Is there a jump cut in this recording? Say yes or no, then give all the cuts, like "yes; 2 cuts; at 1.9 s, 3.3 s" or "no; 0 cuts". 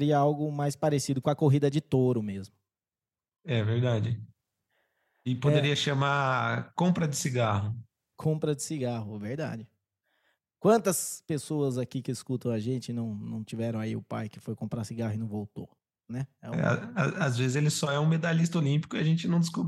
no; 0 cuts